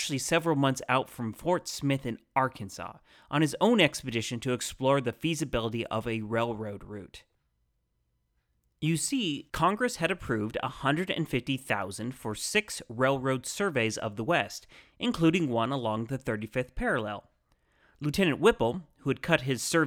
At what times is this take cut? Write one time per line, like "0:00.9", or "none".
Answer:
0:09.5

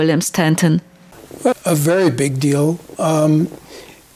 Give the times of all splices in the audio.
0:01.5

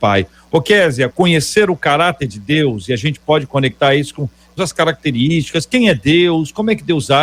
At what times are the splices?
0:01.1
0:04.6

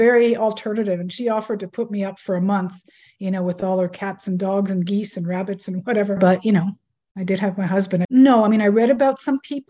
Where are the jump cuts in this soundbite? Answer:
0:06.2
0:08.0

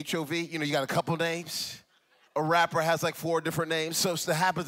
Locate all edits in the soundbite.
0:02.3

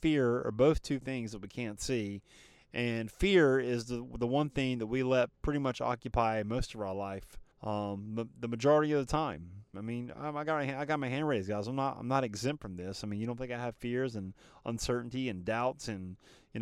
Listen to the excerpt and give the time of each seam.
0:07.5
0:09.7

